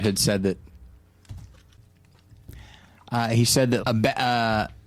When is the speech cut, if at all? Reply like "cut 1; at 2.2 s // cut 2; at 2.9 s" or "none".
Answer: cut 1; at 3.8 s